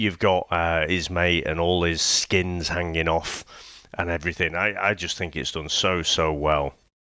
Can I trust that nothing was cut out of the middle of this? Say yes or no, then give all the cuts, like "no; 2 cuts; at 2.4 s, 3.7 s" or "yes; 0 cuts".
yes; 0 cuts